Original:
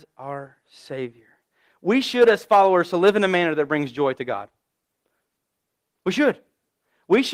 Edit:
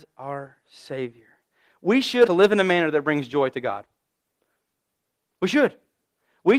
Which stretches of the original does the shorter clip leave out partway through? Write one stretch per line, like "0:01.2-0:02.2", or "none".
0:02.3-0:02.9